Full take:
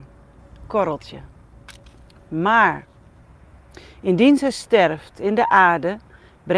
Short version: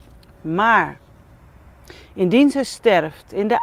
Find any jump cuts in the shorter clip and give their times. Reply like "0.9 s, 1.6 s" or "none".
none